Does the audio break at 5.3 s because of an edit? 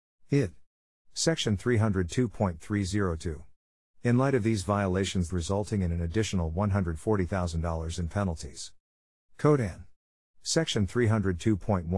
yes; 2 cuts; at 5.3 s, 9.3 s

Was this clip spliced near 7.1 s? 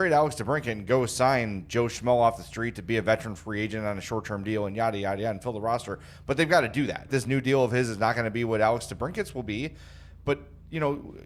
yes; 1 cut; at 7.1 s

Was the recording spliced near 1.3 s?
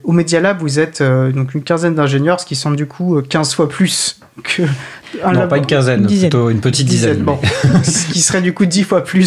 no; 0 cuts

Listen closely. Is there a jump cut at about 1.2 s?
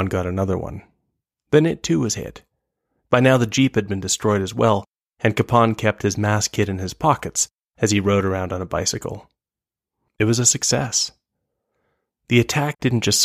no; 1 cut; at 10.1 s

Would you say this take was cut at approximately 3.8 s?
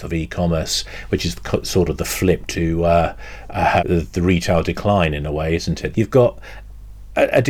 yes; 2 cuts; at 3.8 s, 5.9 s

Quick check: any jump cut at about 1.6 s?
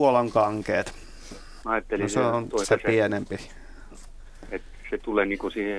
yes; 2 cuts; at 1.6 s, 2.6 s

